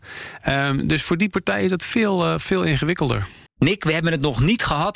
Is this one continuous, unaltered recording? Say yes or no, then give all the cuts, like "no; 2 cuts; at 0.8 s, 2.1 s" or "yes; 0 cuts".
no; 1 cut; at 3.5 s